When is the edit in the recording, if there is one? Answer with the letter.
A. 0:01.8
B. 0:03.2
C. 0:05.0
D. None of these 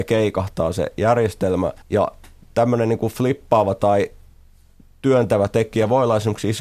A